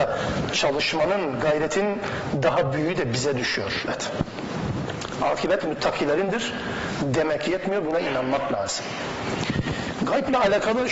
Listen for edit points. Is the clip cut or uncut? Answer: cut